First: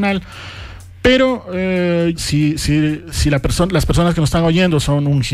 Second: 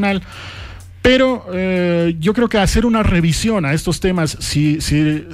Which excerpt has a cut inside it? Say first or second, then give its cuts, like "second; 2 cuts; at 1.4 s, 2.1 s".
first; 1 cut; at 2.1 s